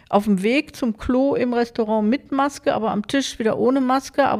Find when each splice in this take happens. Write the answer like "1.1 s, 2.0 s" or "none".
none